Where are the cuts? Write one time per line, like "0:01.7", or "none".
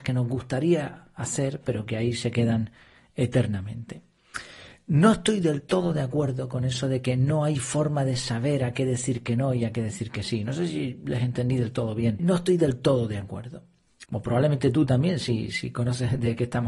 0:12.2
0:14.0

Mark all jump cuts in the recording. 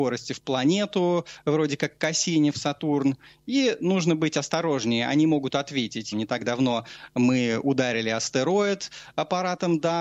0:06.1

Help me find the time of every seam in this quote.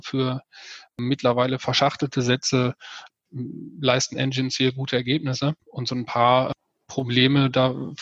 0:05.6

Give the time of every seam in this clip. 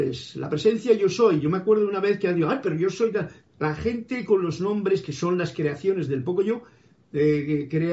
none

